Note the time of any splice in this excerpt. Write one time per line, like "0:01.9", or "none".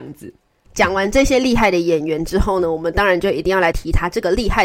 0:03.7

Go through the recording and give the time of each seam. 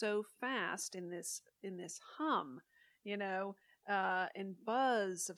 none

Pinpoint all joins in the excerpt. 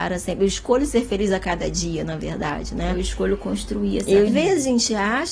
0:04.3

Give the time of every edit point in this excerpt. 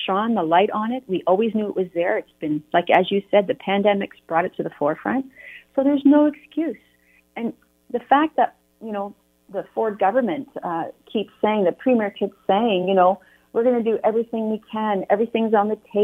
none

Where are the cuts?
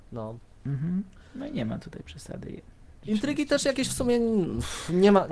none

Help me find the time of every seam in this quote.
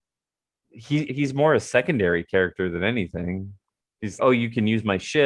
0:01.1
0:04.2

